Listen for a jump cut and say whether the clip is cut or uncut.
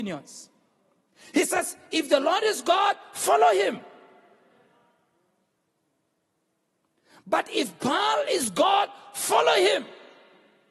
uncut